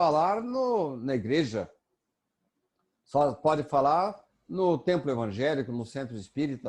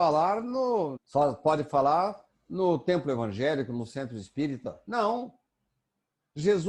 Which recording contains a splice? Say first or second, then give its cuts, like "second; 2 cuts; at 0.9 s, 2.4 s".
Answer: second; 1 cut; at 1.0 s